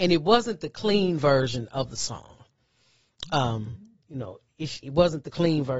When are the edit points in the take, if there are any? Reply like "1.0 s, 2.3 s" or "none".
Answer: 4.8 s